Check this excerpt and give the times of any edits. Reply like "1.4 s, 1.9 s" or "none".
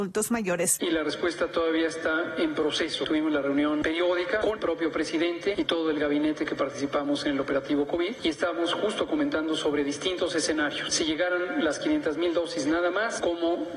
4.4 s